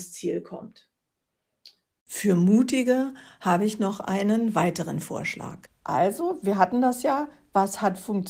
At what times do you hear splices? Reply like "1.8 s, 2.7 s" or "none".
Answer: 2.0 s, 5.7 s